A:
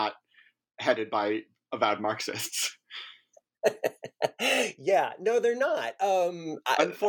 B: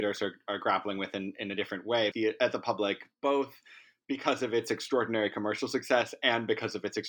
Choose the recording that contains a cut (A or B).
B